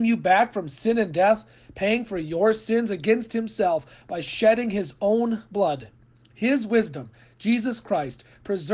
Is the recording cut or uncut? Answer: uncut